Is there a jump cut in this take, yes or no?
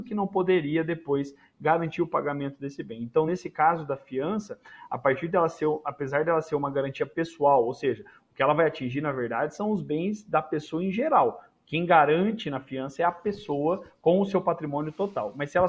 no